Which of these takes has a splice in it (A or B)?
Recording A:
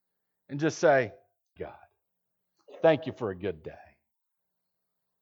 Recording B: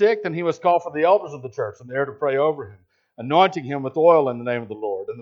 A